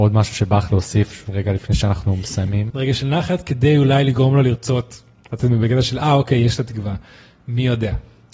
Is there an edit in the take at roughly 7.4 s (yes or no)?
no